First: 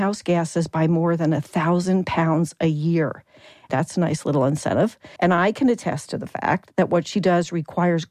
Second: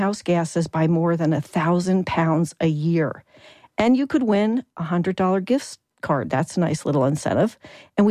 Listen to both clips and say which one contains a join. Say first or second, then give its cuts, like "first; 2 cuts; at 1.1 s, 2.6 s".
first; 2 cuts; at 3.7 s, 5.2 s